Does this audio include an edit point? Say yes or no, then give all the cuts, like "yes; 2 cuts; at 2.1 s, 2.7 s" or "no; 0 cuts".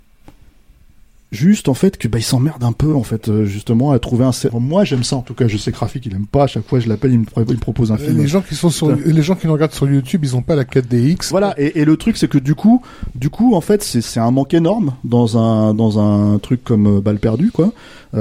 yes; 2 cuts; at 4.5 s, 11.3 s